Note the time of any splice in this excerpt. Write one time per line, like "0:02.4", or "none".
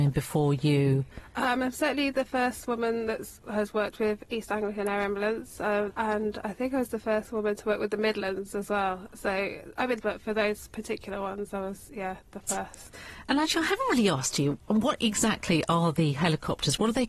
0:05.9
0:10.0